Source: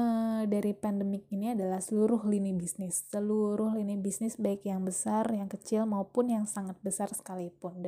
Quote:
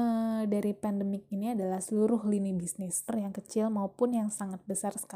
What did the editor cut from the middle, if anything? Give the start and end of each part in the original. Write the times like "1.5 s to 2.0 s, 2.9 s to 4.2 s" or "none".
3.1 s to 5.2 s

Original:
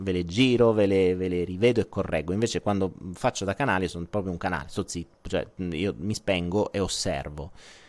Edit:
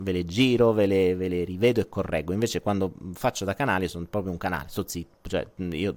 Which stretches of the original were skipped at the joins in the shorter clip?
none

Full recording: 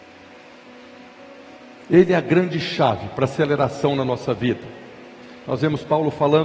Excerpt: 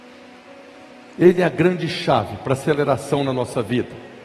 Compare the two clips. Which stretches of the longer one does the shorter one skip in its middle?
none

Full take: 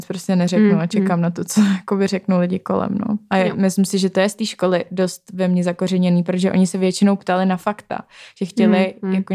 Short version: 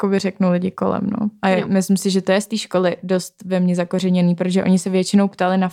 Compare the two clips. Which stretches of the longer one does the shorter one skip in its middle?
none

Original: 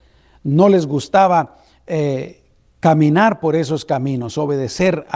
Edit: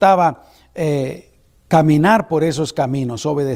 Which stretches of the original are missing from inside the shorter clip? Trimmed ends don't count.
none

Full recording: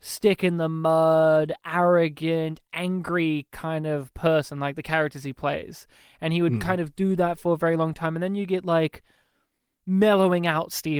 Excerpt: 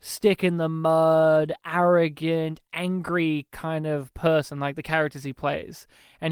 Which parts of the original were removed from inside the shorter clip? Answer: none

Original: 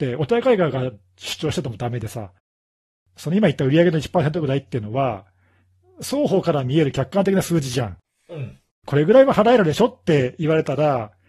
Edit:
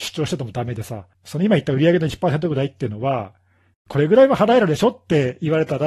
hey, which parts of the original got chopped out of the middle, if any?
2.4 s to 3.1 s, 5.7 s to 8.7 s

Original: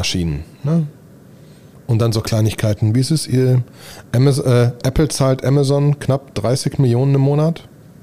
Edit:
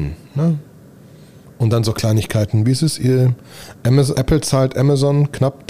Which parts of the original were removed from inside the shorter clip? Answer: 4.4 s to 4.8 s

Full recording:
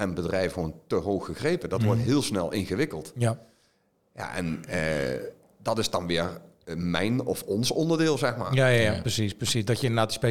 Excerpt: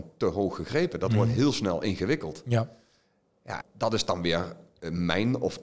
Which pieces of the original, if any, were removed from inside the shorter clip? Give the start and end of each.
4.3 s to 5.4 s

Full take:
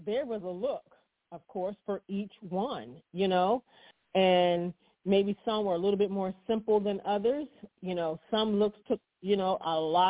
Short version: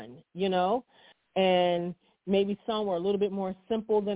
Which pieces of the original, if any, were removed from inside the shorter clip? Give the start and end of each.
none

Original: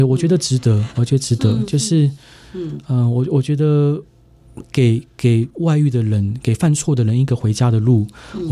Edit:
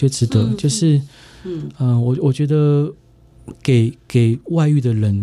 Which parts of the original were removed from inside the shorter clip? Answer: none

